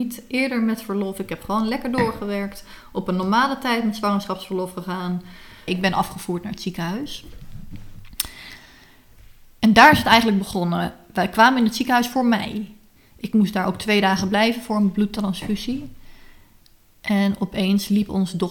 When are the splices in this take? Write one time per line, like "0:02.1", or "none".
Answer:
0:05.7